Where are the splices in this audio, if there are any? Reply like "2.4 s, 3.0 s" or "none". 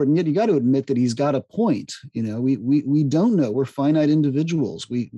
none